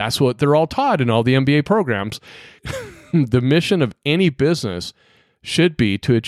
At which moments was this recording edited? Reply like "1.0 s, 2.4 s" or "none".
2.6 s